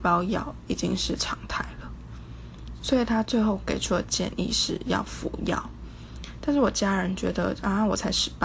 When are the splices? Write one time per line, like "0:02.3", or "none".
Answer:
0:02.8